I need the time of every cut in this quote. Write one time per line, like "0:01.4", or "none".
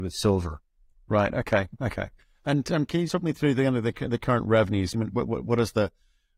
0:03.1
0:04.9